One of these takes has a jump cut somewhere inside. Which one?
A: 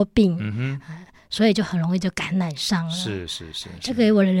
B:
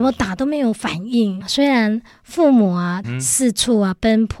B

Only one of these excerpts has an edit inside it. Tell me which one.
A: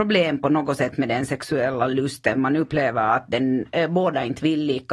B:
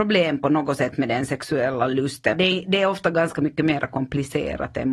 B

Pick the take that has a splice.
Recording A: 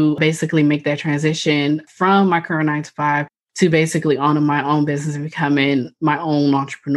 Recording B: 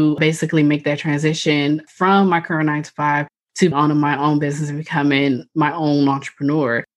B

